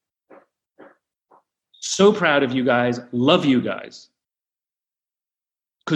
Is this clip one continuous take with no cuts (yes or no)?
yes